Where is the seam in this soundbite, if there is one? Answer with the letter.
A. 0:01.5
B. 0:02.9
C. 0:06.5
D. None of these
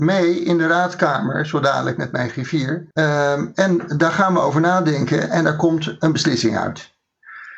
B